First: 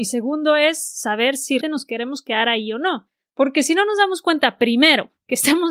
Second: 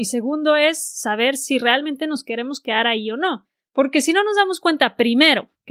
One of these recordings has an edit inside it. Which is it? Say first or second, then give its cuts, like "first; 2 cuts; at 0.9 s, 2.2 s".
first; 1 cut; at 1.6 s